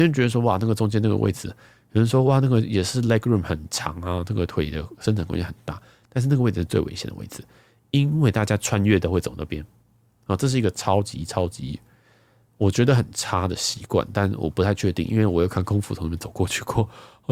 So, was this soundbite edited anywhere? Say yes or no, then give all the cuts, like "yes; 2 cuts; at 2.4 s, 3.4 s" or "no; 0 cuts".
no; 0 cuts